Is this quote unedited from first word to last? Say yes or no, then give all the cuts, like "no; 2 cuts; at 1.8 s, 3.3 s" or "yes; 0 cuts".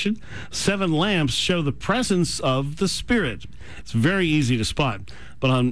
no; 1 cut; at 3.8 s